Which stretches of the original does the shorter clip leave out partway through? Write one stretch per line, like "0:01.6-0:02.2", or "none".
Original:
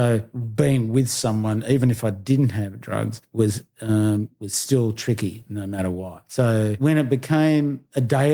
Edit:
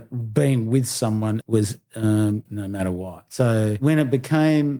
0:01.6-0:03.3
0:04.3-0:05.4